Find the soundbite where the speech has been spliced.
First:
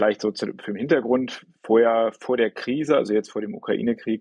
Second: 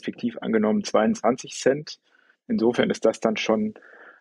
second; 1 cut; at 2.3 s

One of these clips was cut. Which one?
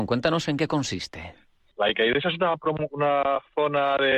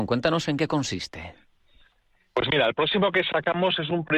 first; 1 cut; at 1.7 s

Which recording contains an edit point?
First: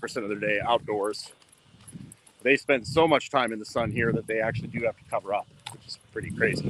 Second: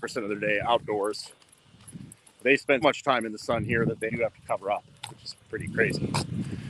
second; 2 cuts; at 2.8 s, 4.1 s

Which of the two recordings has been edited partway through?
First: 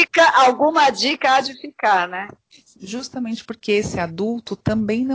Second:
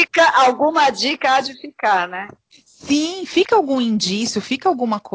first; 1 cut; at 2.7 s

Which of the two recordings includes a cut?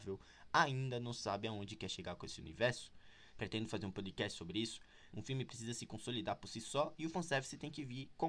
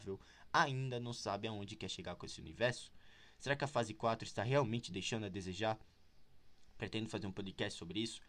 first; 2 cuts; at 3.3 s, 5.1 s

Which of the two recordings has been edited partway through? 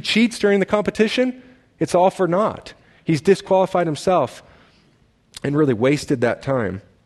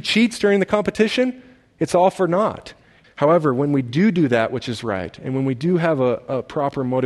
second; 1 cut; at 3.0 s

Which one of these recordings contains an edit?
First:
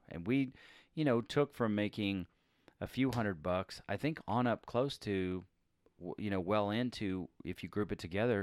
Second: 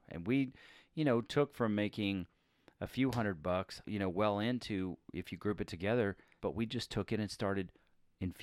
second; 2 cuts; at 3.8 s, 6.4 s

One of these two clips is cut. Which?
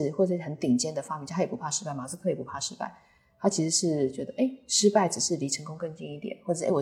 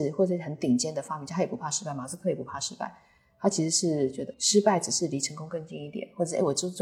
second; 1 cut; at 4.3 s

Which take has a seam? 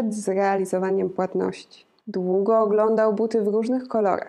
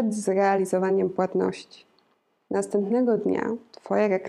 first; 1 cut; at 2.0 s

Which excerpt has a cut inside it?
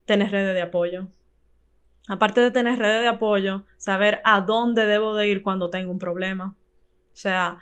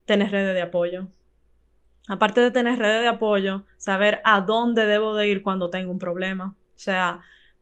second; 1 cut; at 6.7 s

